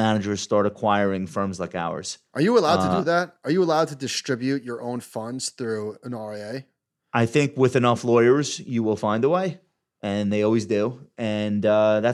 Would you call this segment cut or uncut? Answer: uncut